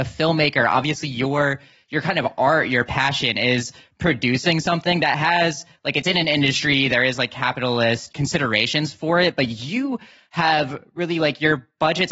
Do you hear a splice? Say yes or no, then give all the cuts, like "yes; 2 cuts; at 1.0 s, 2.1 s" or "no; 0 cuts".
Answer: yes; 1 cut; at 8.1 s